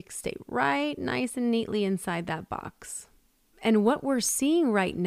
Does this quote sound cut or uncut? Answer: cut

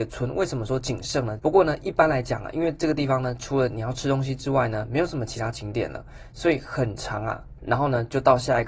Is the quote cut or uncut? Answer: cut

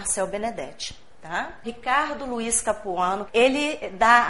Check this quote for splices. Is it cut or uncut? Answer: cut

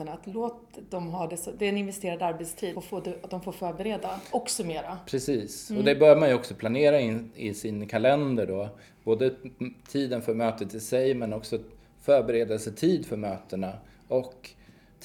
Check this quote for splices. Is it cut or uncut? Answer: cut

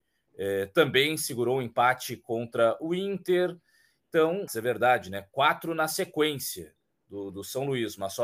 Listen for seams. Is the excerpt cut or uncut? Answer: cut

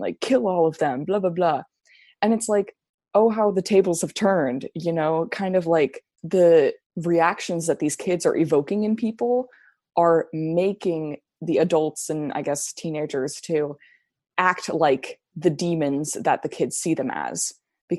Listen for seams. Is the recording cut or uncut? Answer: cut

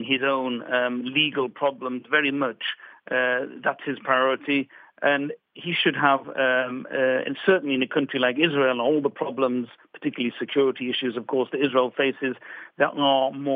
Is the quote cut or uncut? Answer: uncut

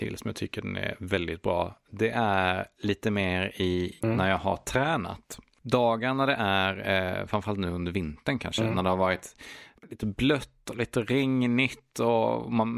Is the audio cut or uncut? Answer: cut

